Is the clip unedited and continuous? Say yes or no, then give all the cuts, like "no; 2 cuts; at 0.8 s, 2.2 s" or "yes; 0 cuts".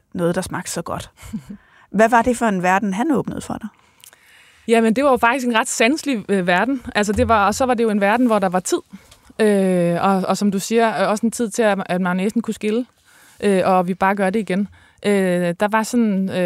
yes; 0 cuts